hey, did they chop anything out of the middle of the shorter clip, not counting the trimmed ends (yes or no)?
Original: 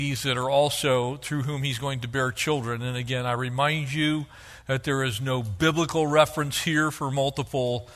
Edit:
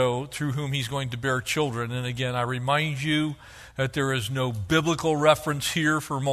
no